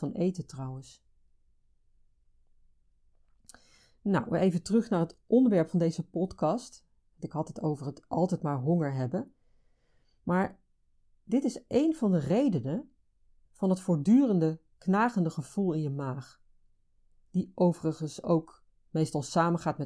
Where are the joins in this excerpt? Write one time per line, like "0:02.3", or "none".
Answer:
0:13.5